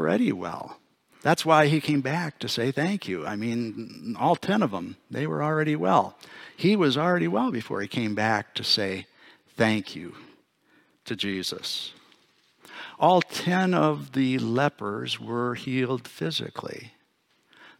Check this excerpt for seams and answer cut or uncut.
uncut